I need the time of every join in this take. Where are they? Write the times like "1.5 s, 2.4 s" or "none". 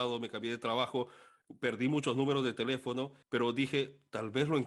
3.2 s